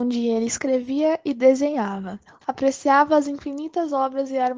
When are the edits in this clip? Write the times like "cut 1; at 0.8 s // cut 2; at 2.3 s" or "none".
cut 1; at 2.4 s